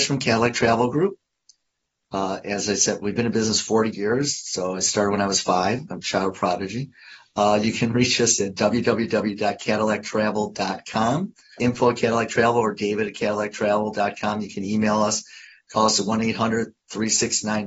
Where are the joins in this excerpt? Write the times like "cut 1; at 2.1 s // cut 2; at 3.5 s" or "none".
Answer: cut 1; at 11.6 s